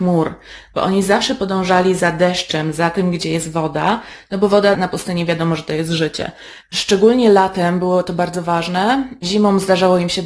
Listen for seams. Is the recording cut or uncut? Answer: cut